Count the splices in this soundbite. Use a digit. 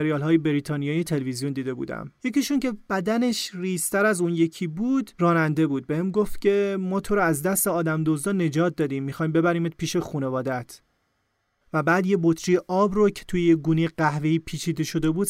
0